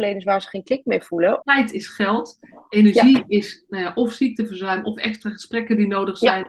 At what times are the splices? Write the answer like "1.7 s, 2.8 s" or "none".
1.4 s